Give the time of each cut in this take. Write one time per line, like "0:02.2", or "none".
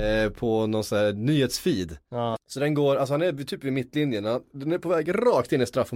0:02.3